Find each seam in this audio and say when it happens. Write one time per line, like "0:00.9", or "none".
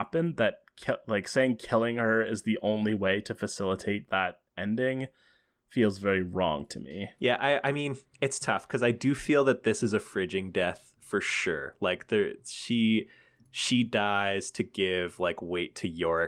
none